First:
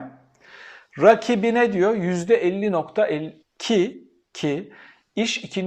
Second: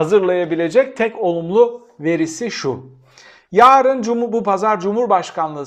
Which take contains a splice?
first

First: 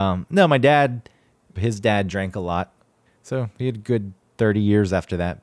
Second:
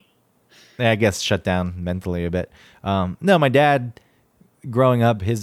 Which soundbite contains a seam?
first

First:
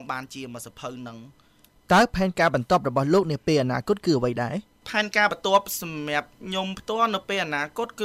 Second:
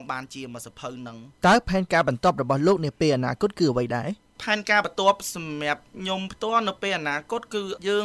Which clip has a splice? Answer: second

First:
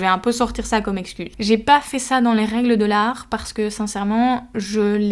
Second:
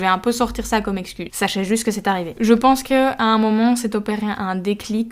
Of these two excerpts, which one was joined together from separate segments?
second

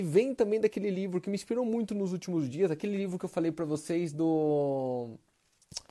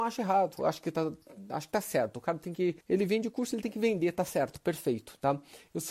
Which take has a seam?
second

